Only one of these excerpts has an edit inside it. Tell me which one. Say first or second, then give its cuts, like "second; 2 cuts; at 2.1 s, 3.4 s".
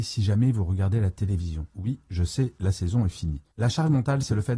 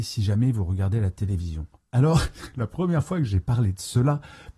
first; 2 cuts; at 1.7 s, 3.5 s